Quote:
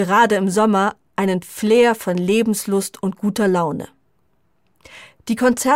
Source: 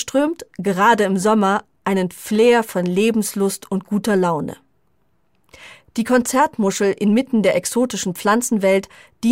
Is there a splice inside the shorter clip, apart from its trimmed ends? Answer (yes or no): no